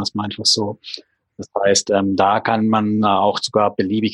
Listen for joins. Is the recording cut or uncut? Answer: uncut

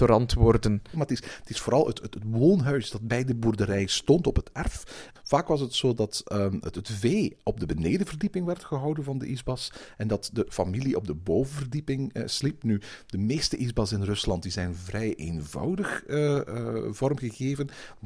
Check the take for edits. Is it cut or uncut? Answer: cut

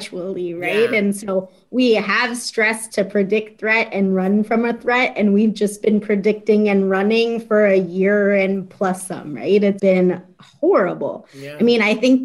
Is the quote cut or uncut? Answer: cut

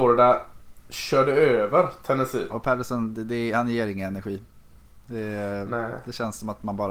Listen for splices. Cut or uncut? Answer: cut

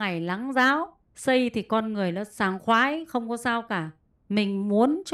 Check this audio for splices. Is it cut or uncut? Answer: cut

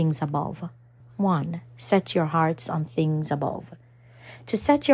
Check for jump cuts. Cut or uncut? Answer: cut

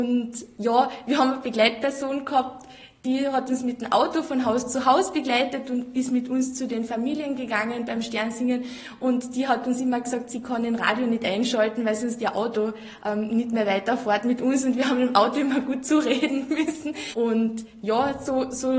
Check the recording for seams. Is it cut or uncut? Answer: cut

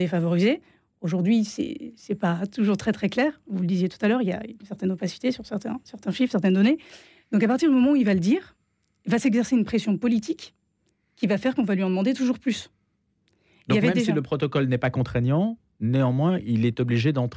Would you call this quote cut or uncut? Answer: uncut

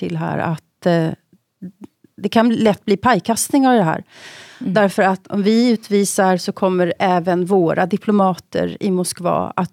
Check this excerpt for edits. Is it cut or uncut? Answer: cut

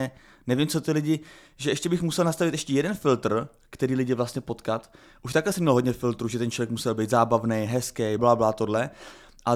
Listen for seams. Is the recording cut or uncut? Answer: cut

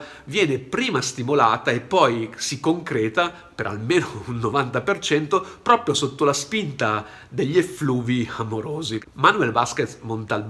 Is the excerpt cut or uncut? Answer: uncut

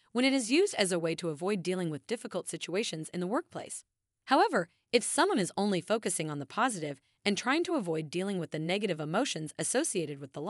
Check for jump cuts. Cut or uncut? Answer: cut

